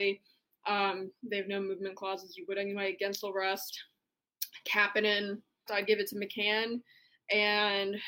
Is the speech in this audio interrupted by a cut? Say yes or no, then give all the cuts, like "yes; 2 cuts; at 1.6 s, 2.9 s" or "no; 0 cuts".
yes; 1 cut; at 5.7 s